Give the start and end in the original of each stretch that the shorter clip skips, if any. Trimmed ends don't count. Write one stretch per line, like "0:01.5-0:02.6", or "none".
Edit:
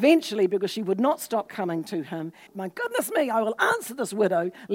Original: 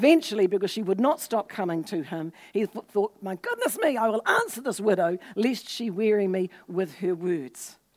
0:02.5-0:03.1